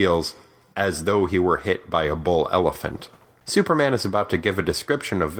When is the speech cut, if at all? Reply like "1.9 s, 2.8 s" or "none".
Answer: 3.3 s